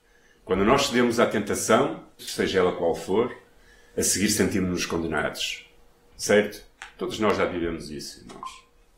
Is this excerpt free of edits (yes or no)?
no